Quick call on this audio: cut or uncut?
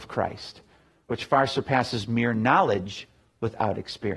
uncut